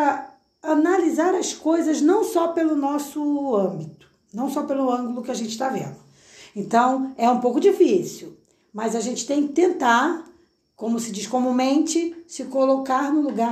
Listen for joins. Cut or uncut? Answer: uncut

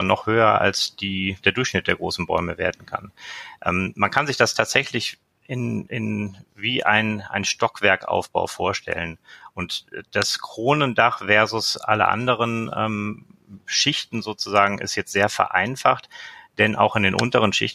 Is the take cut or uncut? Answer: uncut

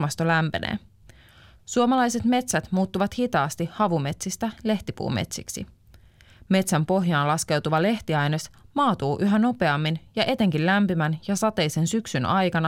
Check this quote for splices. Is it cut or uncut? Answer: cut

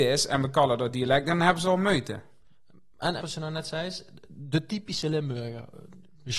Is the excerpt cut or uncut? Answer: cut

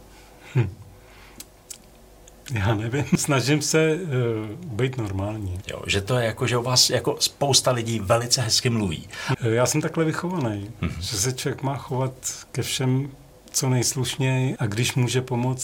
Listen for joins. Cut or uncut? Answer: cut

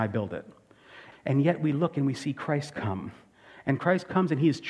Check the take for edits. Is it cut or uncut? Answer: cut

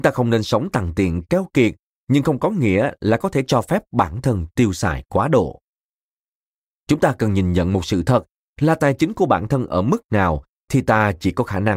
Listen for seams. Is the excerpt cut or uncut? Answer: uncut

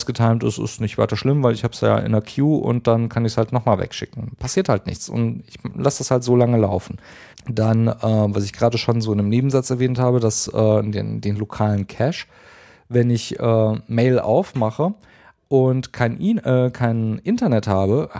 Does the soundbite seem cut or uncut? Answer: cut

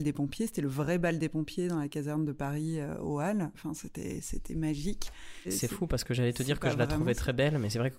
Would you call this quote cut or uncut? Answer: cut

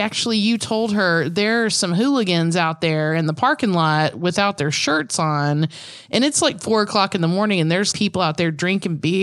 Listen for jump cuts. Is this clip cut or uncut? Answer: cut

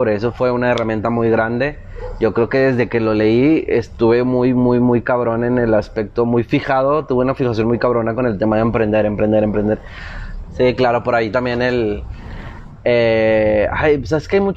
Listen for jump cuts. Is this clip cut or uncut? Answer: cut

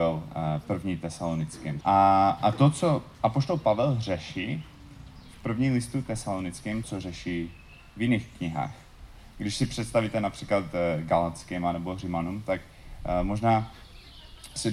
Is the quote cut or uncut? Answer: cut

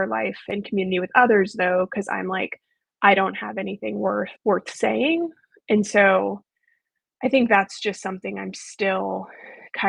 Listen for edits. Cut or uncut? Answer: cut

